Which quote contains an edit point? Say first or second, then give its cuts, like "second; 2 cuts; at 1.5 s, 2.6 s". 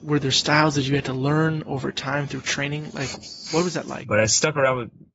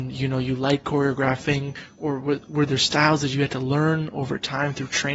first; 1 cut; at 4.0 s